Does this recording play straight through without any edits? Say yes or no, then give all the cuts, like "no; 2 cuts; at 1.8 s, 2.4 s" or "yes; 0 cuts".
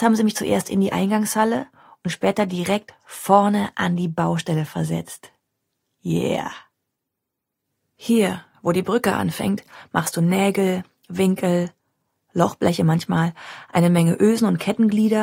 yes; 0 cuts